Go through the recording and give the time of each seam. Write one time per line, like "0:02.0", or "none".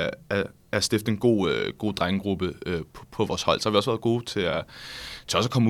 none